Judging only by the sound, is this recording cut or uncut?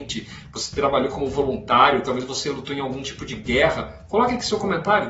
uncut